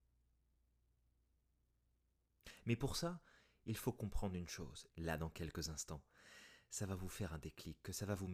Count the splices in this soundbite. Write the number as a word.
one